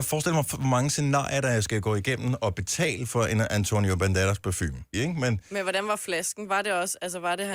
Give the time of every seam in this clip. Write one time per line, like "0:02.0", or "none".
0:04.9